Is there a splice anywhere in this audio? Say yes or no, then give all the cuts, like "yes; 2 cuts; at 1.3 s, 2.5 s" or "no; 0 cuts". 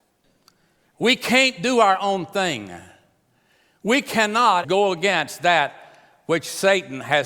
yes; 1 cut; at 4.6 s